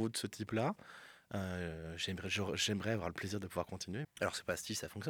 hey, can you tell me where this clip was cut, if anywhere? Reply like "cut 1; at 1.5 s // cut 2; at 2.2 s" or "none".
cut 1; at 4.0 s